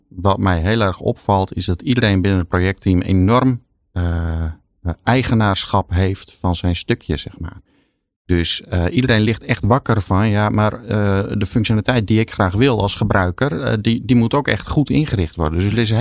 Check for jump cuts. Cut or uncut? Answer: uncut